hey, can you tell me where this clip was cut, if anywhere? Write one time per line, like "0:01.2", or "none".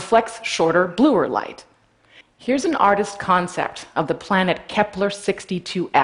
0:02.2